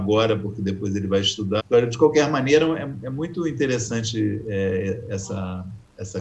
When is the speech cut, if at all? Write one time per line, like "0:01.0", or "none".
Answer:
0:01.6